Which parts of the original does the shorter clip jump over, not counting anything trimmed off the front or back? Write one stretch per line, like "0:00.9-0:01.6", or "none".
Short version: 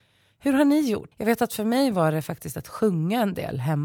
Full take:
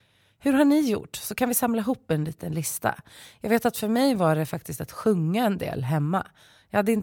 0:01.1-0:03.4